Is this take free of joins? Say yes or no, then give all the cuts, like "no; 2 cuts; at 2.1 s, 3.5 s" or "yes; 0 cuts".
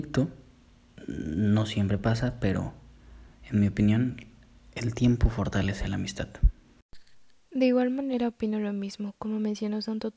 yes; 0 cuts